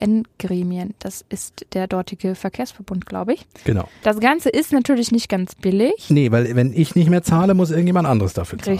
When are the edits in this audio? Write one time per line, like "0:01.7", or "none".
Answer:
0:04.0